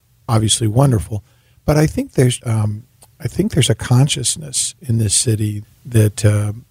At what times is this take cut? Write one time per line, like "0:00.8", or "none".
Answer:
0:02.4
0:05.6